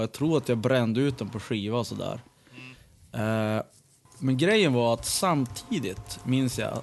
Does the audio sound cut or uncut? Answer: uncut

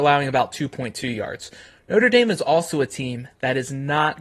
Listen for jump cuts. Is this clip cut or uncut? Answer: uncut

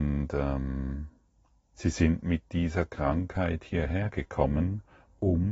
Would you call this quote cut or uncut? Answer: uncut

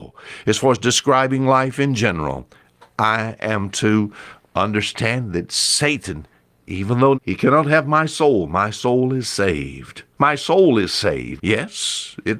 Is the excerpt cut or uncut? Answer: cut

